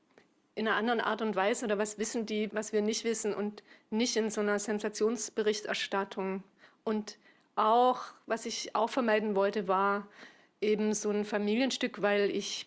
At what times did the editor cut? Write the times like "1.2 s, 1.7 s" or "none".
2.5 s